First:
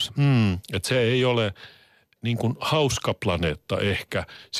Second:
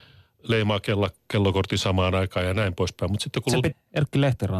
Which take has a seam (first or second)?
second